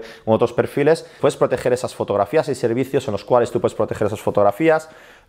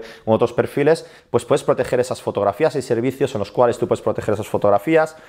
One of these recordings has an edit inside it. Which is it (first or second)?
first